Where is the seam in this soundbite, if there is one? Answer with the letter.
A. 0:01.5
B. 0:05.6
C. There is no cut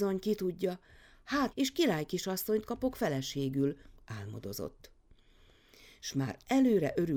A